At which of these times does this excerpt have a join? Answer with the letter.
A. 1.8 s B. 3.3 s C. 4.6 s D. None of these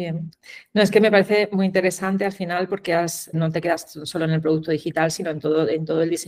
B